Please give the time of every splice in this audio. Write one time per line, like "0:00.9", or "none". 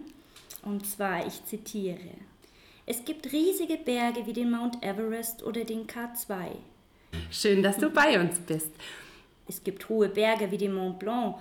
0:07.1
0:09.4